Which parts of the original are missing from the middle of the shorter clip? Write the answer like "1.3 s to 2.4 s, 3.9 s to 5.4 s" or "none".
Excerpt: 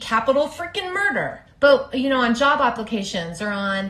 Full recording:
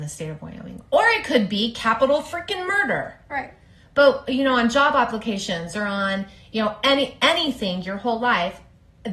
3.2 s to 3.8 s